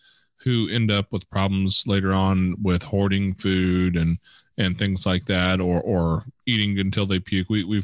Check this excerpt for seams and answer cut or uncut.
uncut